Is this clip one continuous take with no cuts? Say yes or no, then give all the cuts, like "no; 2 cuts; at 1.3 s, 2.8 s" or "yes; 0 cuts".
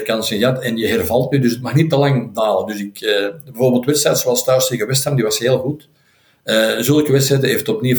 yes; 0 cuts